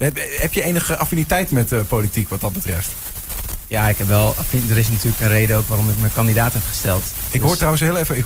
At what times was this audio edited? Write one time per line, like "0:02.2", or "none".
none